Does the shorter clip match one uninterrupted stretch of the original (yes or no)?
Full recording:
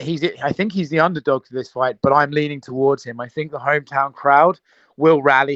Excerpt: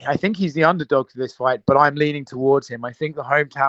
yes